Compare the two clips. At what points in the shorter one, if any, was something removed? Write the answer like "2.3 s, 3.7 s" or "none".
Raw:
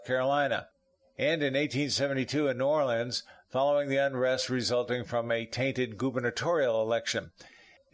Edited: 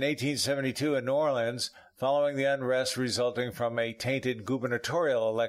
none

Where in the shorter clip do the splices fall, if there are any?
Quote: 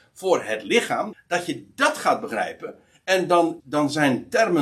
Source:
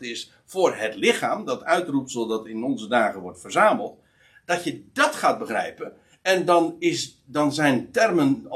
1.1 s, 3.6 s

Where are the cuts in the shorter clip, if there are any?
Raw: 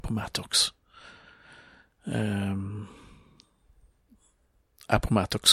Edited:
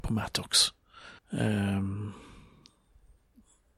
1.2 s

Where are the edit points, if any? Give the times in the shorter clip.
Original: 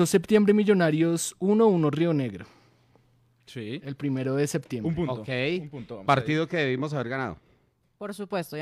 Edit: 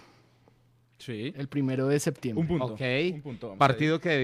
none

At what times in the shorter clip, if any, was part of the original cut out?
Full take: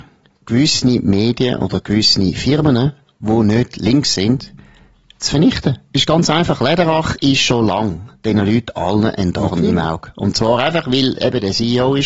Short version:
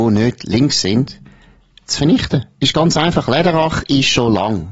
none

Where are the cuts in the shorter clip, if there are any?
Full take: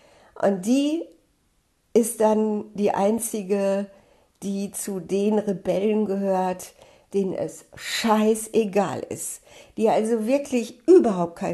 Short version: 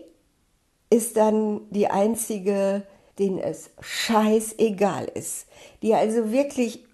3.1 s

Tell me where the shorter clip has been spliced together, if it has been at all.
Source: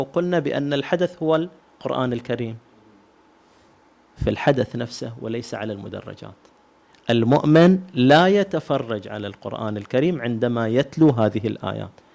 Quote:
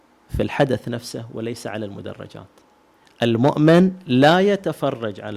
none

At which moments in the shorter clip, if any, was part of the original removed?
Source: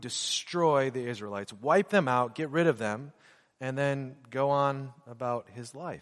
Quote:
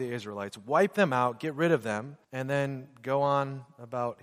2.2 s

